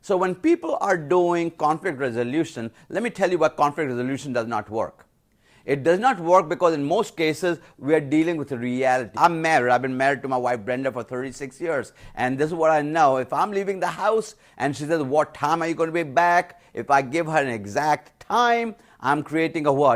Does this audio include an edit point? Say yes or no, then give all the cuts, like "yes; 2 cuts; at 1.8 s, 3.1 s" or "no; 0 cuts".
yes; 1 cut; at 9.1 s